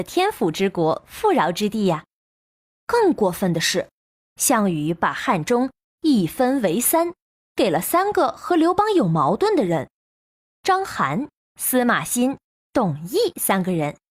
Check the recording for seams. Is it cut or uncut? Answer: uncut